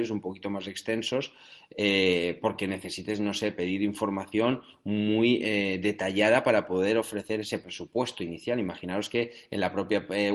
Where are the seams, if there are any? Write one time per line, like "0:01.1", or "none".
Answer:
none